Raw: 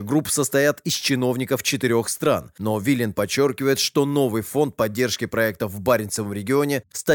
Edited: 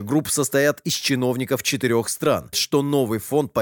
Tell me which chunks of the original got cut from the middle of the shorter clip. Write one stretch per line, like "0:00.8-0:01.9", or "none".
0:02.5-0:03.8

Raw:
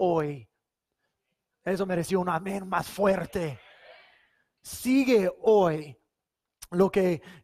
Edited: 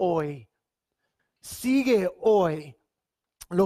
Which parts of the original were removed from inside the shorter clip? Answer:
0:01.2-0:04.4

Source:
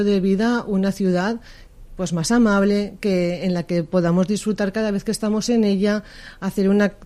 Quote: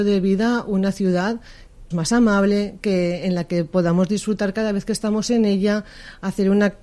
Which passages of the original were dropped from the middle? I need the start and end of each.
0:01.9-0:02.1

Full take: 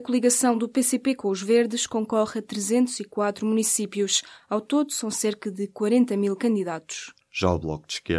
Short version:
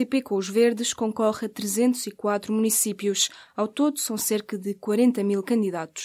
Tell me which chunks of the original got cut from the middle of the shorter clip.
none

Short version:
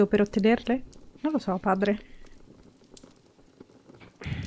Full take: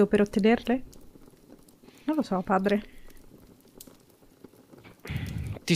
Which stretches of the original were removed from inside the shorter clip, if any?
0:01.2-0:02.0

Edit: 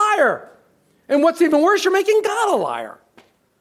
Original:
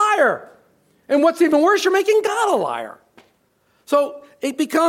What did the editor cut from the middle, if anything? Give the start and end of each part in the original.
none

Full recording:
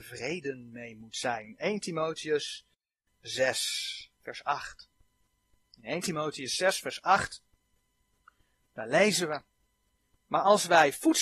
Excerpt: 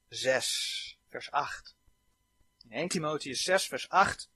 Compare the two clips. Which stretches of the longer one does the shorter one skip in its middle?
none

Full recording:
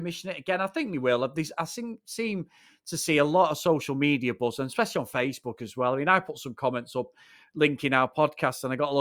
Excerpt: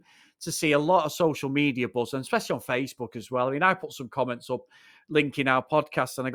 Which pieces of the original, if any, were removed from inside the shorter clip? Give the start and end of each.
none

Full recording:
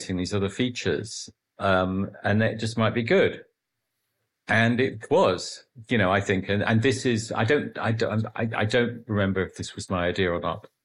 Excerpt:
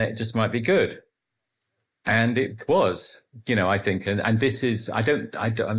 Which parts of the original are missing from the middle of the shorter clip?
none

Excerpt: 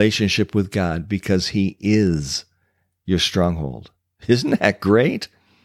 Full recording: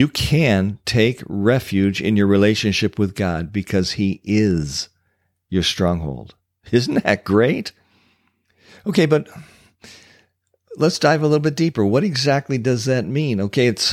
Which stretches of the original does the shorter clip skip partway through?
none

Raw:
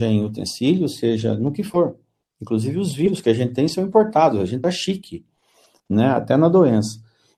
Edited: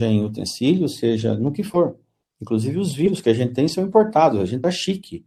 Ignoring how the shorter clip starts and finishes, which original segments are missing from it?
none

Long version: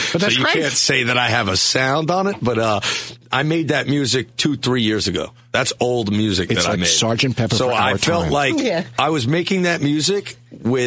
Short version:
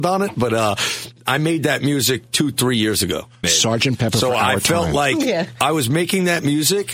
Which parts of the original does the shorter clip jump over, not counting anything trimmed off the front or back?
0:05.5-0:06.8

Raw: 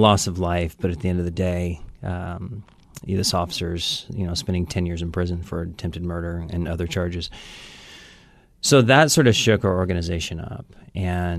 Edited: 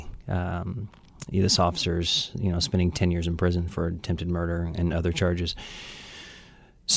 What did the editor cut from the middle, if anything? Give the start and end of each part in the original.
none

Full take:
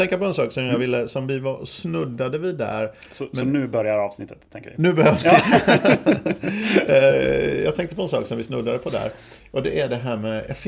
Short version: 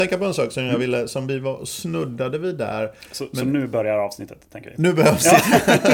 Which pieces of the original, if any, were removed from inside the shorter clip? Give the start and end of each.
none

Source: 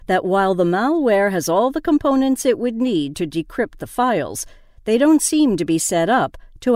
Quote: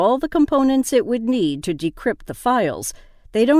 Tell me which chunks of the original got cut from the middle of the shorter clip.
none

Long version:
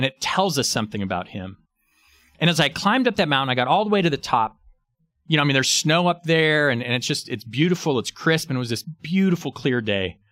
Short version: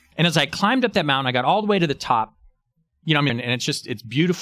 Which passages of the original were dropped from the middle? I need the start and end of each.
0:05.5-0:06.7

